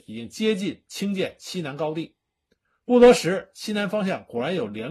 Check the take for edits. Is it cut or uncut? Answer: uncut